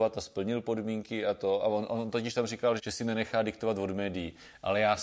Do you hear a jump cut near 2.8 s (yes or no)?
yes